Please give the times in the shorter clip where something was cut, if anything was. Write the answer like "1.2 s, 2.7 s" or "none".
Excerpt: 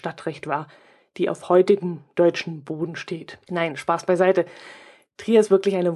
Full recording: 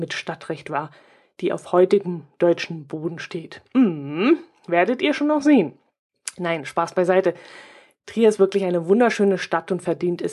3.5 s